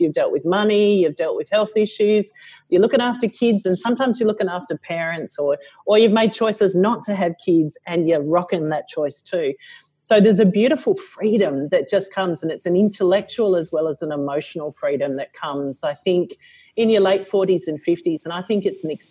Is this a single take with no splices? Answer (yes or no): yes